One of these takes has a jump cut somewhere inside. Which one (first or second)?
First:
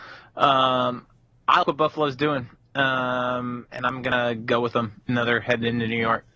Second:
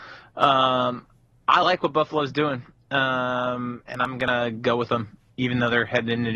first